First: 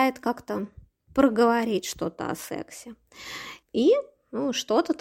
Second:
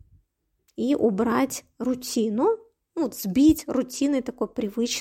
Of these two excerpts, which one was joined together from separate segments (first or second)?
first